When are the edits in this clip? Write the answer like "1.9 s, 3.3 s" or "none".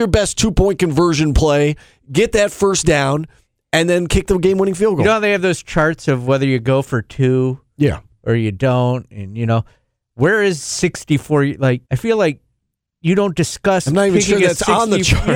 11.9 s